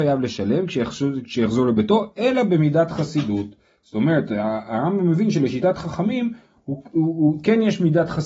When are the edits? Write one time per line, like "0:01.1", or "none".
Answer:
none